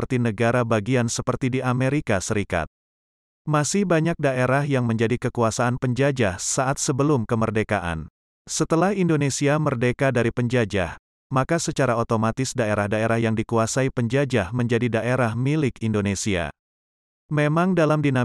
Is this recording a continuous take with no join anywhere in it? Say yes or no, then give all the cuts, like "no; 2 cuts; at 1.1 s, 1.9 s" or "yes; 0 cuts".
yes; 0 cuts